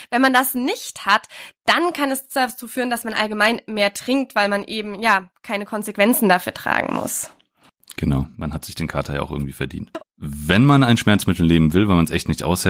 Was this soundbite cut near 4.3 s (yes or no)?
no